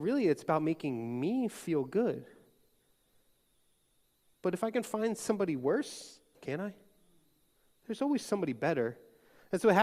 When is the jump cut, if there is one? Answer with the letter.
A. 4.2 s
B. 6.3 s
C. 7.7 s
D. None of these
B